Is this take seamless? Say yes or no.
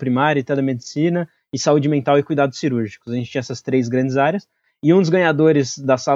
yes